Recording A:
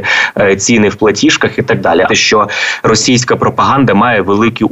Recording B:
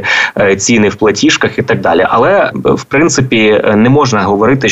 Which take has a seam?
A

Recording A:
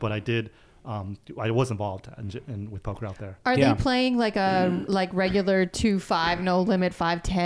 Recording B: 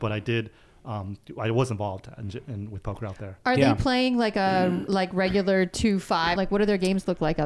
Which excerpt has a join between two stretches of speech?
B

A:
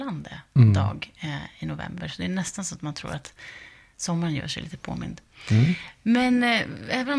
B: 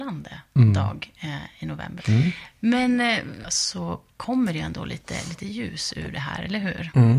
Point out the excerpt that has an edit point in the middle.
B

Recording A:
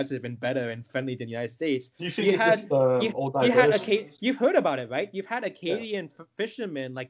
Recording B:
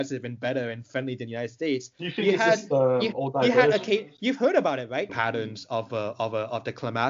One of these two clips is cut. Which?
B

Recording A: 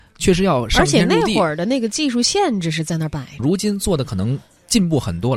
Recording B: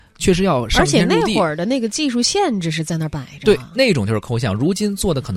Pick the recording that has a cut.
A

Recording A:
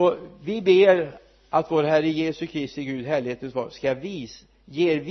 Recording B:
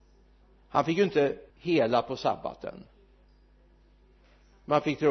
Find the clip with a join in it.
B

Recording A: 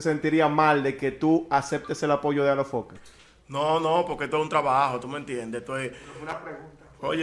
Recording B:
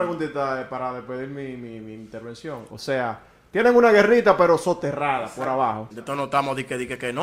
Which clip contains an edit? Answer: B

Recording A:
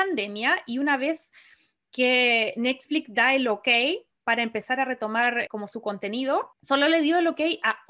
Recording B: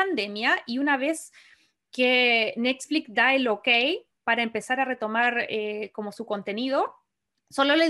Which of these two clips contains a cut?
A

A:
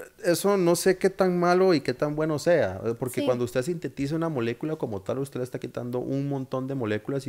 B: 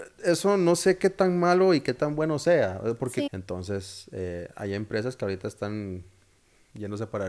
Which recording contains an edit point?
B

